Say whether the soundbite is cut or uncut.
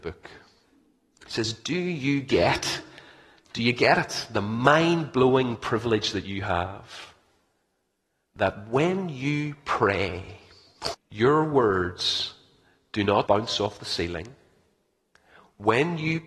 cut